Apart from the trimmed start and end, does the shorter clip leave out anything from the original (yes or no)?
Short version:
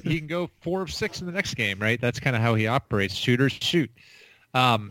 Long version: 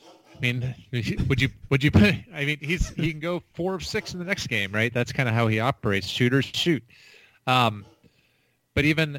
no